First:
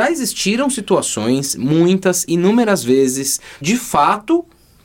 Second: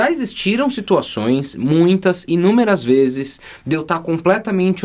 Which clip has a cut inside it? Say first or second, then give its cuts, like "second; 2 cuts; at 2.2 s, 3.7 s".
first; 1 cut; at 3.6 s